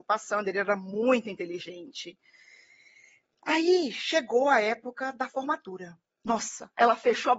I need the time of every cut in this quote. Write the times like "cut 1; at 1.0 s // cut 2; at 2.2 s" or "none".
cut 1; at 6.1 s